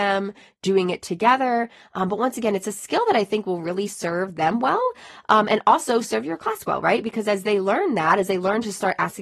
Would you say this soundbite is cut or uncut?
uncut